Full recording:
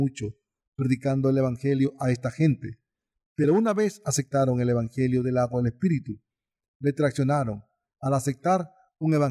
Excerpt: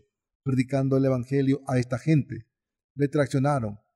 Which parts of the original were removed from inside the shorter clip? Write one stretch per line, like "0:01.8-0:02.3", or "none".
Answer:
0:03.1-0:06.6

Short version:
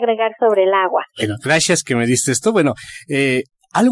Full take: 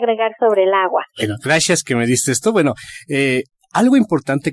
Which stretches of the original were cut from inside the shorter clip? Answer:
none

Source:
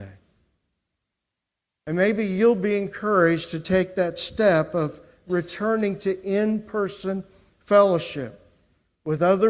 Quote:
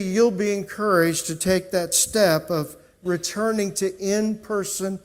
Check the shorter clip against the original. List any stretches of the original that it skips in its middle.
none

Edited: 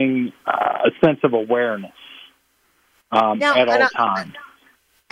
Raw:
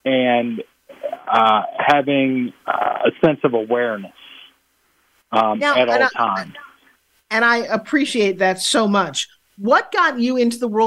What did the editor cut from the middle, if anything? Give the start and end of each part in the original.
none

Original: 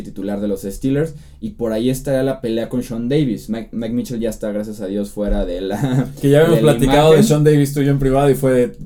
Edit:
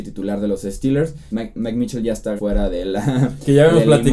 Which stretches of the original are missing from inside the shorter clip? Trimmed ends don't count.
0:01.3-0:03.5
0:04.5-0:05.1

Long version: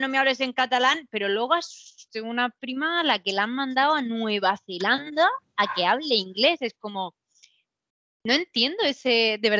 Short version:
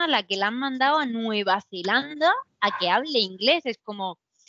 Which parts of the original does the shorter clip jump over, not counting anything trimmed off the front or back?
none

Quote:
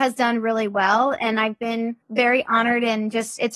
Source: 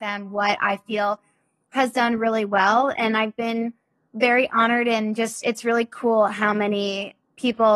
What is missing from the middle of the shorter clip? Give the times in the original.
0:03.8-0:04.1

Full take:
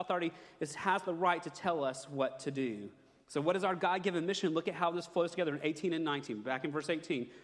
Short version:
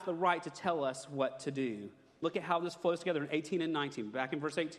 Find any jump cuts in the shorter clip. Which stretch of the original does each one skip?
0:03.2-0:04.5

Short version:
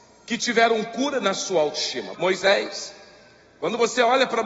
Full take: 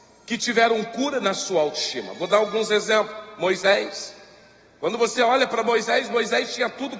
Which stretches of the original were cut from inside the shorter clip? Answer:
0:02.1-0:03.3

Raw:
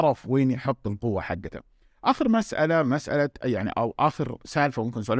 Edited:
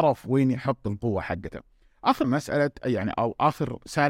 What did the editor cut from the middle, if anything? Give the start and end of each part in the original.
0:02.2-0:02.8

